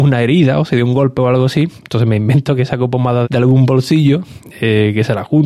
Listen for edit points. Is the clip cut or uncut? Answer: cut